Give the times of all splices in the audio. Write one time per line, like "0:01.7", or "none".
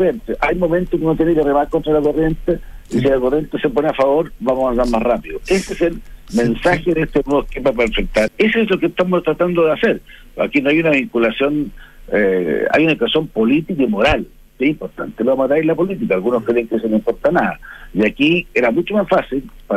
0:08.3